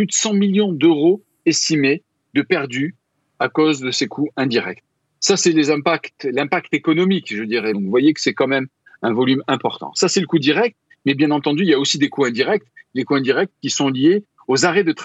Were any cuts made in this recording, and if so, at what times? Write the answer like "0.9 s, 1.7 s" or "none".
7.7 s